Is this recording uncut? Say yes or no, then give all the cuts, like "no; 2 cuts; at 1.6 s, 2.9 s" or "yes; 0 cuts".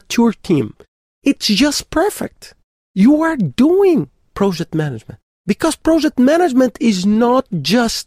no; 1 cut; at 2.8 s